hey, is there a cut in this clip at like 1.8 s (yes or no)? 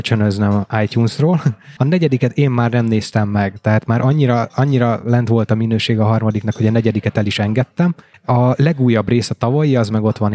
yes